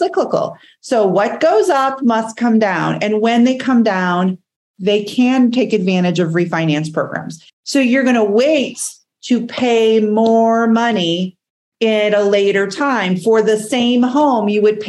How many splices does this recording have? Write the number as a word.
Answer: one